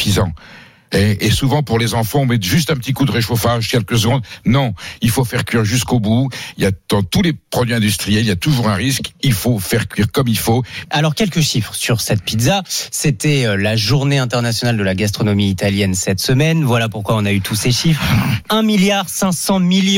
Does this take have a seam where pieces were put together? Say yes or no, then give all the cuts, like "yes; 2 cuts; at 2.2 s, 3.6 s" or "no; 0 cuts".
yes; 1 cut; at 10.8 s